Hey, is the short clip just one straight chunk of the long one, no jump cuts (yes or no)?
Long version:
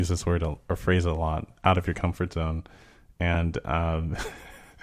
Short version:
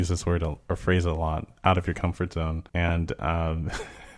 no